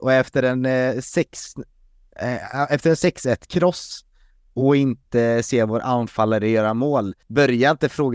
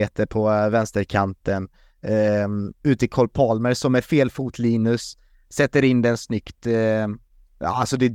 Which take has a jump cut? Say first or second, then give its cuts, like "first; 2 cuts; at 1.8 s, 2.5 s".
first; 1 cut; at 7.2 s